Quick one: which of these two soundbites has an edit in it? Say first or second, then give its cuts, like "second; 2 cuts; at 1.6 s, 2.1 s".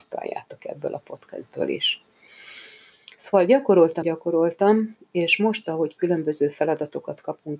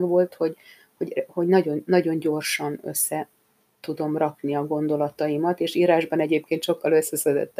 first; 2 cuts; at 4.0 s, 5.6 s